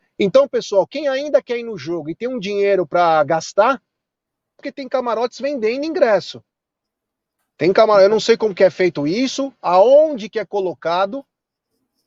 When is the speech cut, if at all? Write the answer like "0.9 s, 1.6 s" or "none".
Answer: 4.6 s

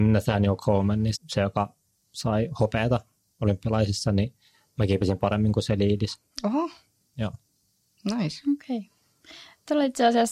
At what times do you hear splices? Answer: 1.2 s

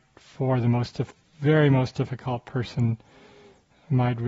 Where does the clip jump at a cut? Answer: none

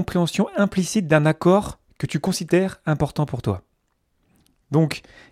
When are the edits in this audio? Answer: none

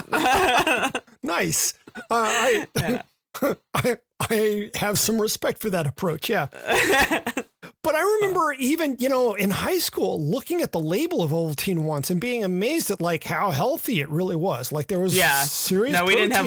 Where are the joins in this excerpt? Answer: none

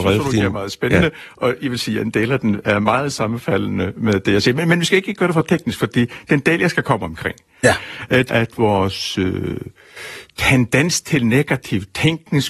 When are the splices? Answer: 8.3 s

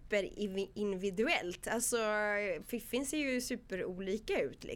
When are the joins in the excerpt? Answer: none

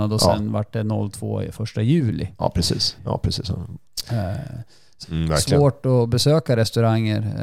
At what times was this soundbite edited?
3.0 s, 5.0 s

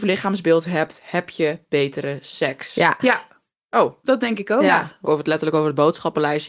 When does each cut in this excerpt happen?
5.0 s

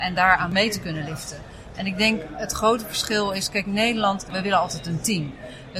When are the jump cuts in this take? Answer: 1.7 s

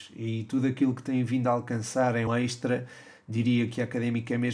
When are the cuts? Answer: 2.3 s

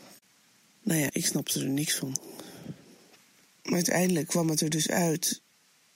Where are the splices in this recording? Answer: 1.1 s

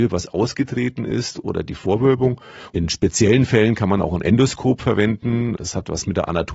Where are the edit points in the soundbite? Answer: 2.7 s

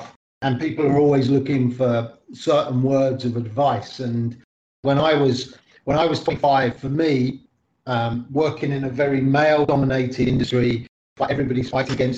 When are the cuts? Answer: none

